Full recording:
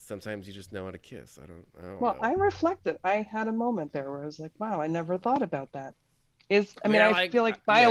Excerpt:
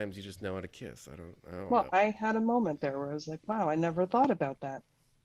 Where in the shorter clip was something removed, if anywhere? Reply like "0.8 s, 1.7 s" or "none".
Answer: 1.9 s